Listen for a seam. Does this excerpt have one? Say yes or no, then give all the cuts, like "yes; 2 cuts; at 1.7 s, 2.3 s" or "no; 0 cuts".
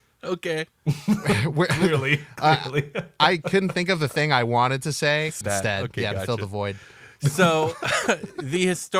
yes; 1 cut; at 5.4 s